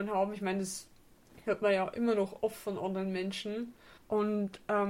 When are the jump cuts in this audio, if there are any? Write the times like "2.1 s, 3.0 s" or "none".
4.0 s